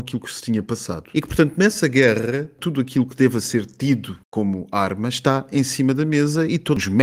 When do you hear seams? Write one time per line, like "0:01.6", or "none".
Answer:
0:01.1